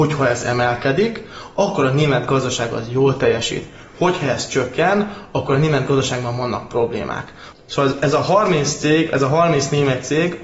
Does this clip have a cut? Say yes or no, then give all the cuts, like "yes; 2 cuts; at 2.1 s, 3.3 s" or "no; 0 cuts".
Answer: yes; 1 cut; at 7.5 s